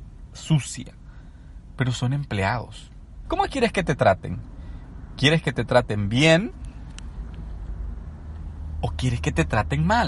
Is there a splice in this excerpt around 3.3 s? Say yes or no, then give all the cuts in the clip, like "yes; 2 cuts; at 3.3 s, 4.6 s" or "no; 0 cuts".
yes; 1 cut; at 3.3 s